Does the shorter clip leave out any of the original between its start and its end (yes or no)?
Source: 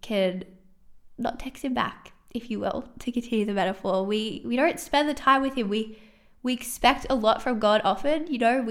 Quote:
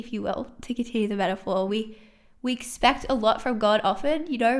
yes